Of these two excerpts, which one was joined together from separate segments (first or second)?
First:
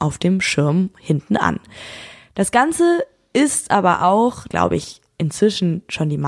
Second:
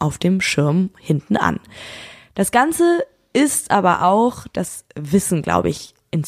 first